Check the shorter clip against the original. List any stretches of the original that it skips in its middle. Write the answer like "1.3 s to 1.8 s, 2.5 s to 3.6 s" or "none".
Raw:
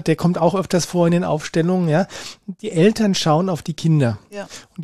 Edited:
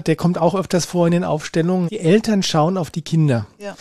1.9 s to 2.6 s